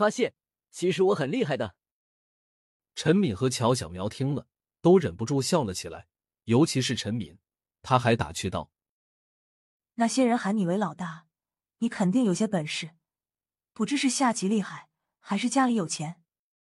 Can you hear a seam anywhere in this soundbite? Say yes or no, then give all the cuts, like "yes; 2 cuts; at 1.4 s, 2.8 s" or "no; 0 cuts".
no; 0 cuts